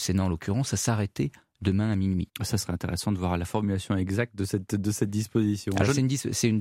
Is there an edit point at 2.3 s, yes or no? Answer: yes